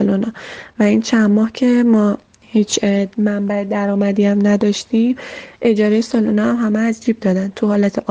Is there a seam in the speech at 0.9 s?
no; 0 cuts

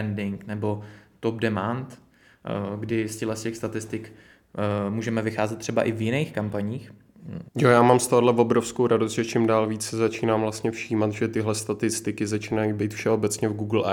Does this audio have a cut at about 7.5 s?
yes; 1 cut; at 7.5 s

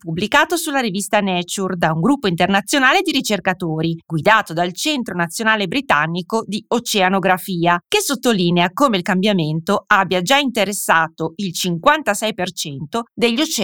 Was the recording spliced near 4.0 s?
no; 0 cuts

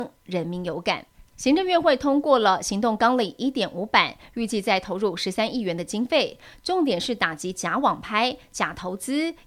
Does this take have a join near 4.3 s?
no; 1 cut; at 1.3 s

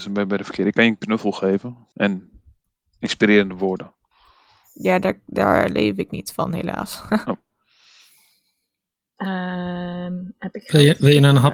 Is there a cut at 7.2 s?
no; 1 cut; at 1.9 s

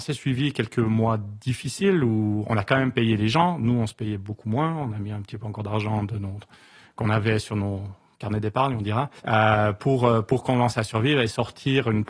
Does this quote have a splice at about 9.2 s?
yes; 1 cut; at 9.2 s

